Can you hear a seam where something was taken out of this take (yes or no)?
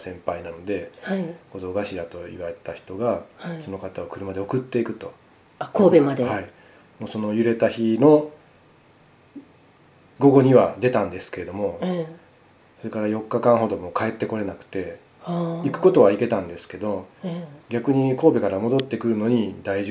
no